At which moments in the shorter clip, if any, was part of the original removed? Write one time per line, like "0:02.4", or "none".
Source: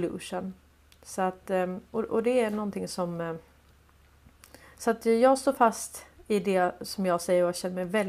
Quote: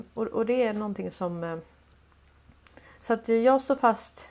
none